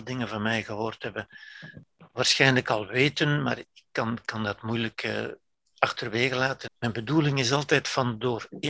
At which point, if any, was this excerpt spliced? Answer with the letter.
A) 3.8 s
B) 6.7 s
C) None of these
B